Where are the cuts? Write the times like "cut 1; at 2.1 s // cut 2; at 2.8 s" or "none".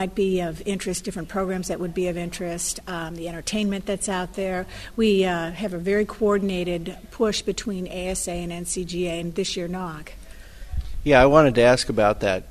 none